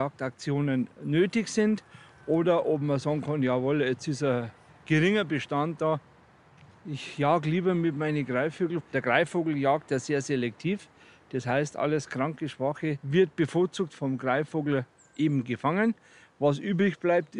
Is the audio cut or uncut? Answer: uncut